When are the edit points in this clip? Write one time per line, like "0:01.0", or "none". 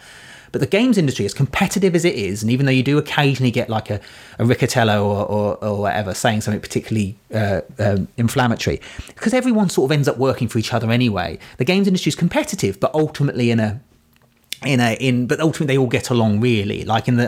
none